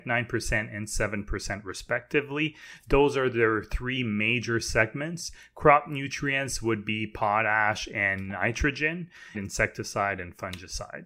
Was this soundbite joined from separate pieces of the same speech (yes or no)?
yes